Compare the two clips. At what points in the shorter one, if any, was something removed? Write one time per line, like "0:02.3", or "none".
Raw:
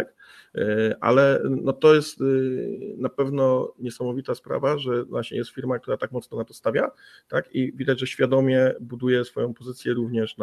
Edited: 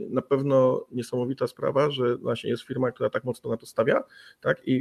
none